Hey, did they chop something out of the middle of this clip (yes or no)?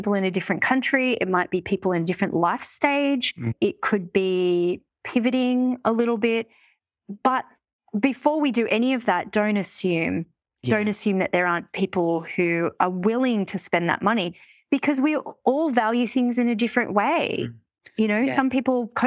no